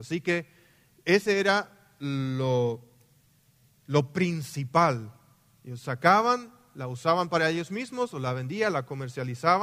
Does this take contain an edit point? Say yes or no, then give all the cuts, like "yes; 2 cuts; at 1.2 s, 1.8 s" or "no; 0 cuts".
no; 0 cuts